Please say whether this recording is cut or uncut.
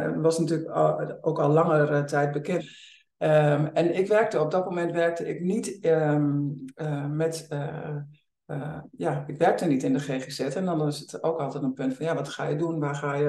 cut